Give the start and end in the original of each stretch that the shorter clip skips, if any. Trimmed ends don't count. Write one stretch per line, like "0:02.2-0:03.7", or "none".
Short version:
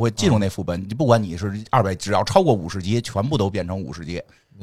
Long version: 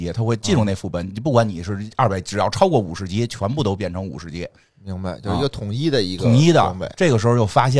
none